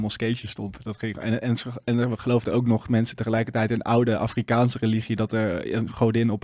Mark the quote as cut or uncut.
uncut